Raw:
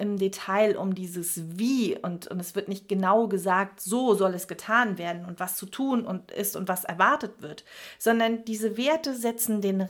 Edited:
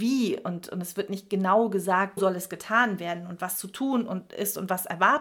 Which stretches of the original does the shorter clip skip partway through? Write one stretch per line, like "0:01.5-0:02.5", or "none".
0:03.8-0:04.2